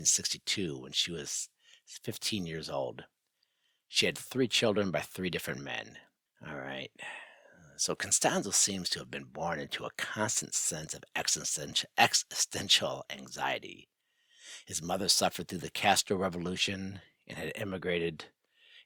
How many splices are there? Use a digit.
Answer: 1